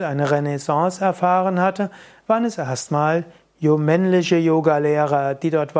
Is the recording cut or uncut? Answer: uncut